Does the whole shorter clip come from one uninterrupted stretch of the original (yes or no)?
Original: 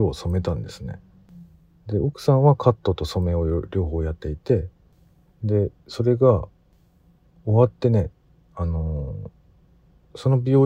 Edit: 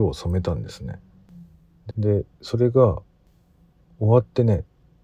no